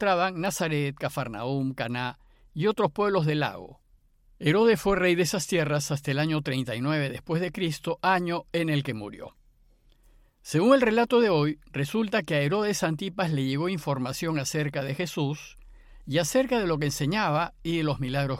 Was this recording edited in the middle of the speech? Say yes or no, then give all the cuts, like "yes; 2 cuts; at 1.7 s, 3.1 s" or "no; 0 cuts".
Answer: no; 0 cuts